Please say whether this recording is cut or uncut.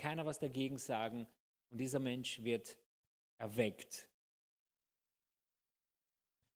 cut